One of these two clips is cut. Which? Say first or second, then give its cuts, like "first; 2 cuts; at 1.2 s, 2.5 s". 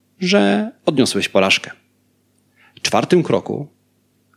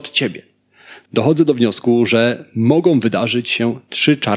second; 1 cut; at 1.0 s